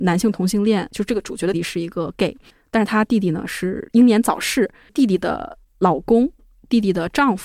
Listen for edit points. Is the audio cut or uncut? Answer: cut